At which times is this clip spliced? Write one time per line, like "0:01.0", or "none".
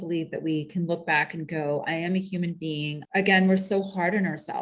0:03.1